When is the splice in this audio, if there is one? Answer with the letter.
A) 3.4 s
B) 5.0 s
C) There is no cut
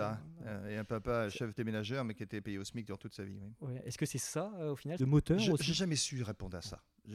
B